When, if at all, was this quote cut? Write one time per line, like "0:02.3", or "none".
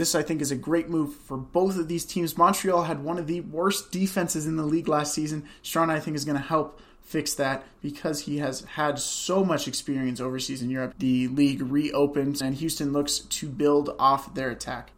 0:10.9
0:12.4